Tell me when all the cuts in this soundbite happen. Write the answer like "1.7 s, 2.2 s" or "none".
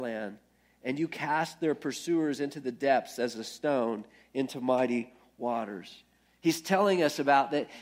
6.3 s

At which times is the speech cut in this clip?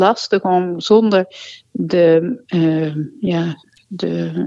none

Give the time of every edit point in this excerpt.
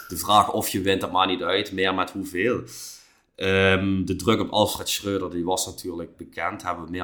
6.1 s

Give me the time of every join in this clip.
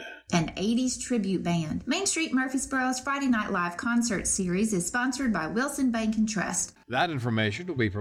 1.8 s, 6.8 s

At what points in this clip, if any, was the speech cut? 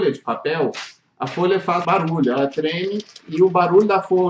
1.8 s

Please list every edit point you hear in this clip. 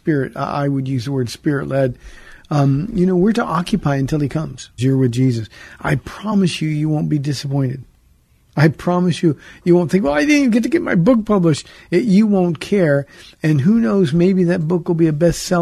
4.8 s

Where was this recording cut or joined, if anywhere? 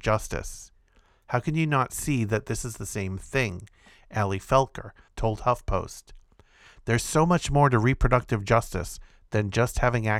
5.1 s

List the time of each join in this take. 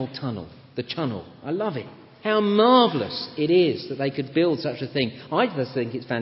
2.2 s

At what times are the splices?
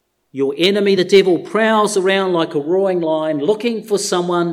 none

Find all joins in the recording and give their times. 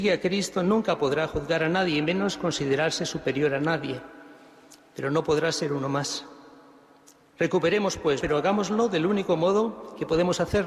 8.2 s

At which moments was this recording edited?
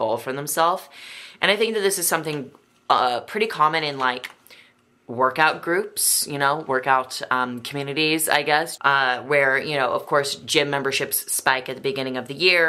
8.8 s

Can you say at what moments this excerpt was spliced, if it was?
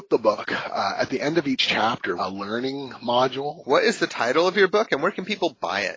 2.2 s, 3.6 s

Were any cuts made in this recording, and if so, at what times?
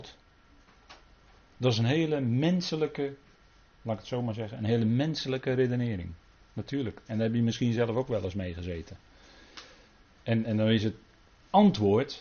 none

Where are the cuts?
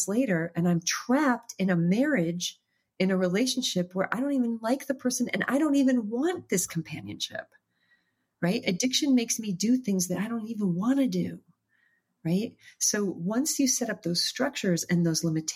none

